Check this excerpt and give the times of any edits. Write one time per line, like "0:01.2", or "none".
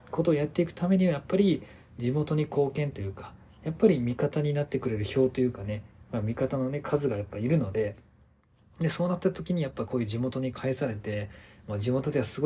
none